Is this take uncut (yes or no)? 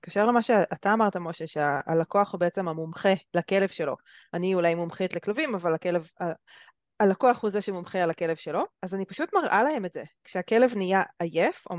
no